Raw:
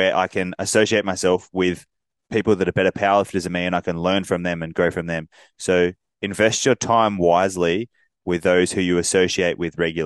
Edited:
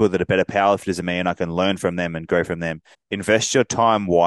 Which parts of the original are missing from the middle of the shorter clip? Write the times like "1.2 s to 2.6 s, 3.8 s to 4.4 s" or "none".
5.4 s to 6.0 s